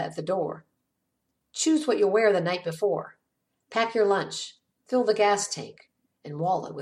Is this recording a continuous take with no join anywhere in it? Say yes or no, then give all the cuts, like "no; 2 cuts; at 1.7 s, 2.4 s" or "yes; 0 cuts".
yes; 0 cuts